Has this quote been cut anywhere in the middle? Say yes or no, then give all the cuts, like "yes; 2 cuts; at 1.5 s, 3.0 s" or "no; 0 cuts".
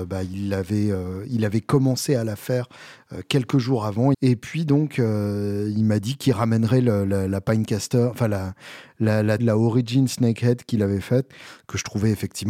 yes; 2 cuts; at 4.1 s, 9.4 s